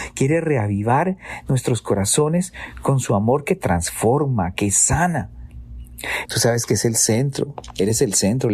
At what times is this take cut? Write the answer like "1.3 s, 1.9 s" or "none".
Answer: 4.5 s, 6.3 s

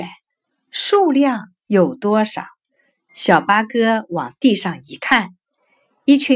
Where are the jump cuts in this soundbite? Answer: 3.1 s

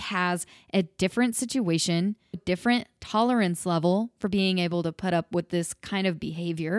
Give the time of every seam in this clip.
2.3 s

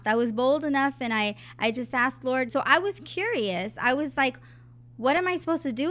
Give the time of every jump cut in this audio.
2.5 s

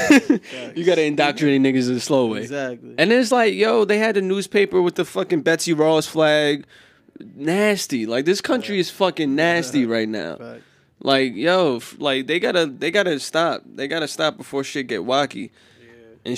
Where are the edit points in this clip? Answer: none

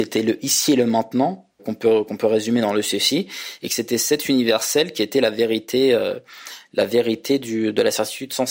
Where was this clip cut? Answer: 1.6 s, 3.7 s

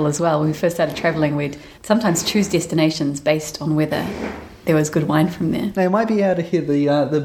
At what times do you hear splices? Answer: 1.7 s, 5.7 s

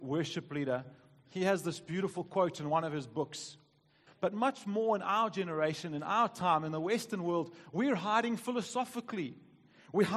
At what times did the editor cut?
4.1 s

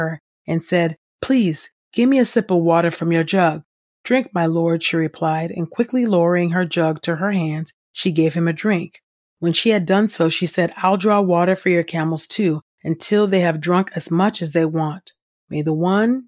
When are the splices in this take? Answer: 15.4 s

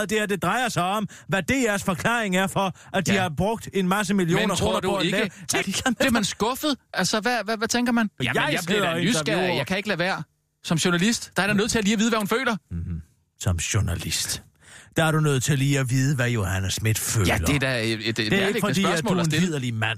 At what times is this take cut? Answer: 5.6 s, 8.2 s

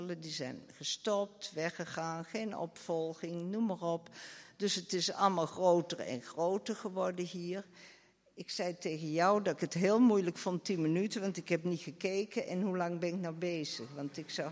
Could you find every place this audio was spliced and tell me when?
none

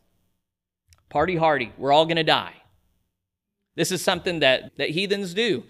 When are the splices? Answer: 4.7 s

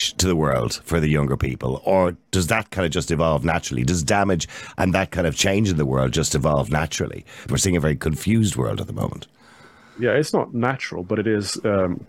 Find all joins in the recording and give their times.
7.5 s

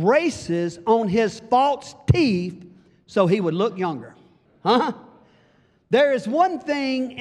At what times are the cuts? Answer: 4.5 s

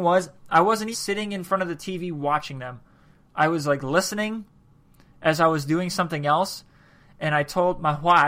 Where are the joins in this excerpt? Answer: 0.9 s

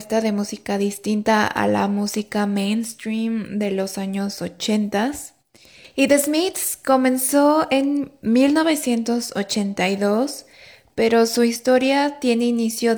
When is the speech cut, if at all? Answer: none

